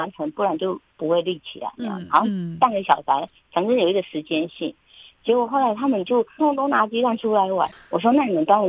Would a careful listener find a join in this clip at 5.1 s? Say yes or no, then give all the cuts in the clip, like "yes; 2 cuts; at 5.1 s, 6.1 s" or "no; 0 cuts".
no; 1 cut; at 6.4 s